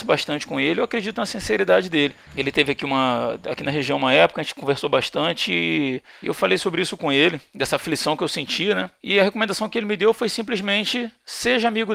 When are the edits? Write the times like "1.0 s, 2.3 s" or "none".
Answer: 2.3 s